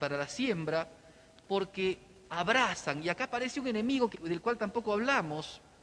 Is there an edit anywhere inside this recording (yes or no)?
yes